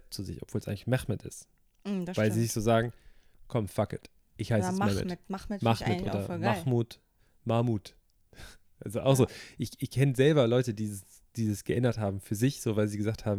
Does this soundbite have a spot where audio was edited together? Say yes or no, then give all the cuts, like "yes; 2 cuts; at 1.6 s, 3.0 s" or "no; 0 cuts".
no; 0 cuts